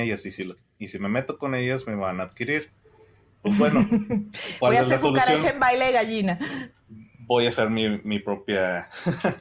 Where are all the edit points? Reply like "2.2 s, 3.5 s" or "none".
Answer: none